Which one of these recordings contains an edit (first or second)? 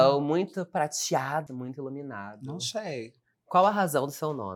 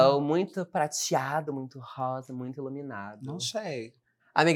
first